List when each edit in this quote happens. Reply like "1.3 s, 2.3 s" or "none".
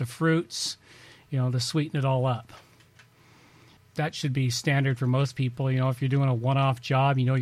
3.8 s